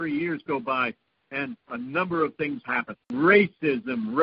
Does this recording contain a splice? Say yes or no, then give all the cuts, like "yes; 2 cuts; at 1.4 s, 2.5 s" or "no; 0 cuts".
yes; 1 cut; at 2.9 s